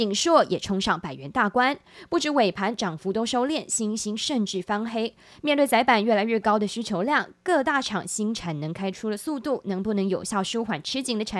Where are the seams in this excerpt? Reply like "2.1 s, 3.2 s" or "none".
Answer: none